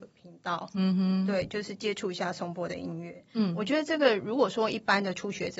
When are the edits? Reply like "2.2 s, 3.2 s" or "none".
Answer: none